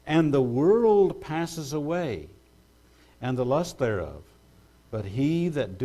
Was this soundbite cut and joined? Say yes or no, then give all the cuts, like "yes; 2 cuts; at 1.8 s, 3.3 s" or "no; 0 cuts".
no; 0 cuts